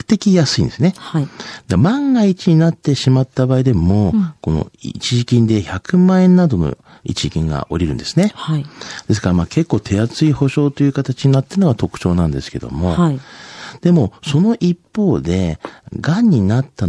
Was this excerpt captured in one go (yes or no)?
yes